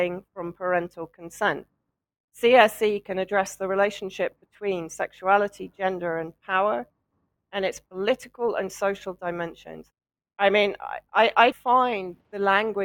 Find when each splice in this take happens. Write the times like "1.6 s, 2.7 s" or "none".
10.3 s, 11.5 s